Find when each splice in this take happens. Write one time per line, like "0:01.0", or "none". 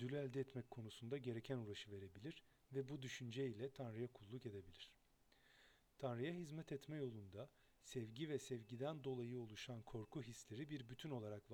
none